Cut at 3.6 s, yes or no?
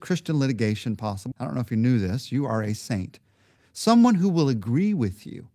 yes